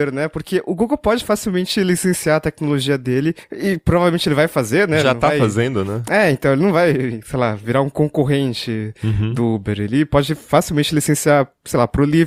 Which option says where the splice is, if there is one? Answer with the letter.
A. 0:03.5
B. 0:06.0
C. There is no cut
C